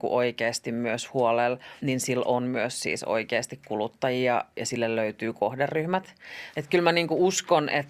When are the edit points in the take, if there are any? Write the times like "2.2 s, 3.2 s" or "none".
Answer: 1.8 s, 6.5 s